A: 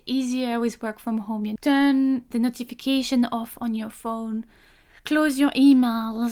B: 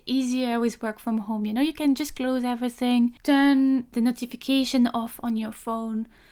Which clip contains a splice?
A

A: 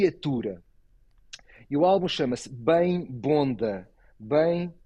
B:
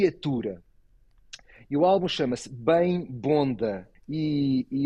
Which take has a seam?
B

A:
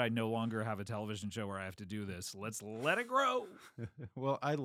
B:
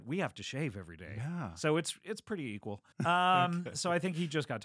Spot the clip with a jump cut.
B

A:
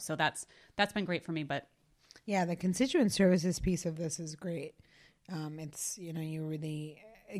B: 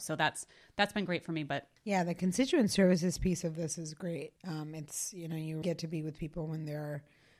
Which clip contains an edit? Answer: B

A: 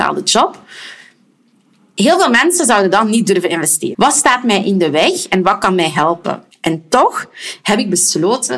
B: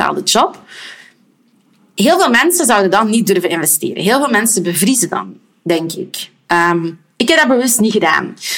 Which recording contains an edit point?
A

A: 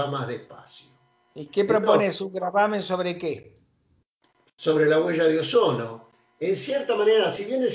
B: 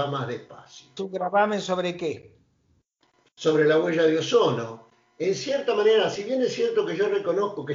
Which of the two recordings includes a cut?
B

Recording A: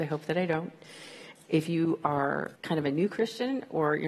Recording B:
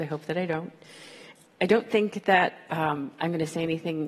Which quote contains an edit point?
A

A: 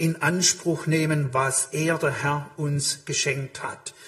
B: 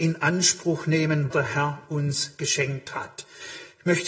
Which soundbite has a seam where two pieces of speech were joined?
B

